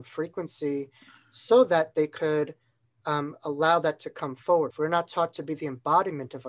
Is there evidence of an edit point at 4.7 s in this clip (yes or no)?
yes